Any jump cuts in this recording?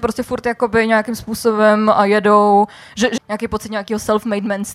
yes; 1 cut; at 3.2 s

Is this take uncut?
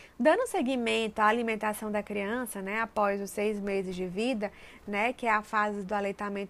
yes; 0 cuts

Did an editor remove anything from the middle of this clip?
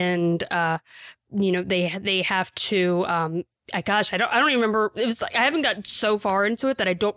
no; 0 cuts

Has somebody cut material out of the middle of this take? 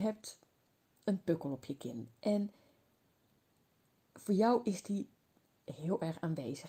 yes; 1 cut; at 1.0 s

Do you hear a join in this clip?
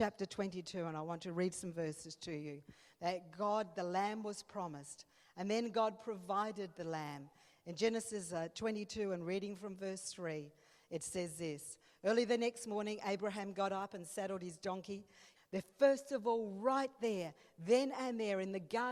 yes; 1 cut; at 15.4 s

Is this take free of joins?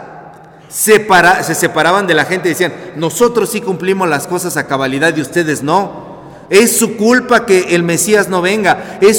yes; 0 cuts

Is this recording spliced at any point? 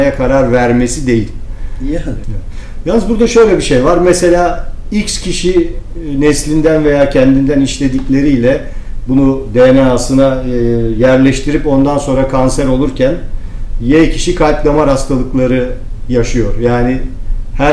yes; 1 cut; at 2.2 s

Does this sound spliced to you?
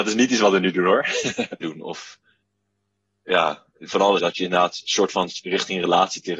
yes; 2 cuts; at 1.6 s, 4.2 s

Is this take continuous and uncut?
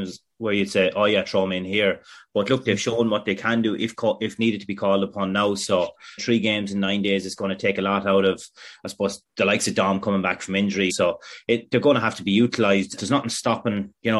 no; 3 cuts; at 6.2 s, 10.9 s, 13.0 s

